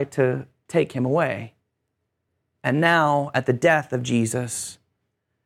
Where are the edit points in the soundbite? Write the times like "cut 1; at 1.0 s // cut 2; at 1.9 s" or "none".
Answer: none